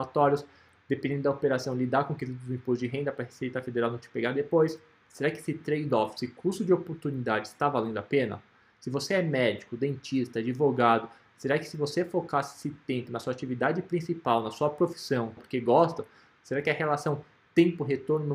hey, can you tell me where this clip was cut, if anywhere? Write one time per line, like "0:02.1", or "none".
0:15.4